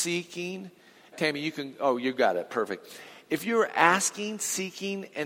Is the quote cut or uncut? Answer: cut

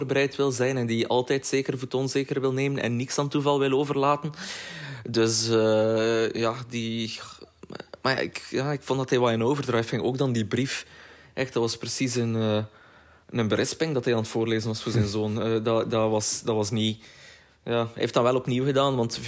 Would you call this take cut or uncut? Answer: uncut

